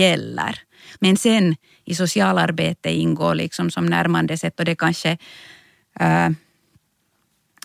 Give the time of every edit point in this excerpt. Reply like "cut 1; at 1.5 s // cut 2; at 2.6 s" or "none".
cut 1; at 0.9 s